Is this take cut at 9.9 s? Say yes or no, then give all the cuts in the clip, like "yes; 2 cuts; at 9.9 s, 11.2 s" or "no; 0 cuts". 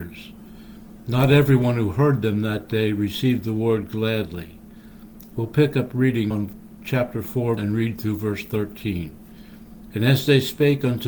yes; 3 cuts; at 6.3 s, 7.6 s, 9.9 s